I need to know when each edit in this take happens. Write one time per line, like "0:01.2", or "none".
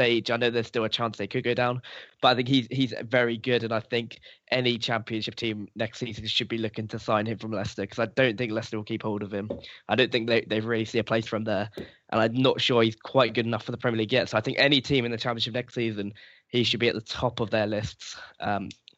none